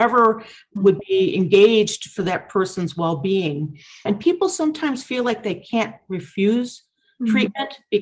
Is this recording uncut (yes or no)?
no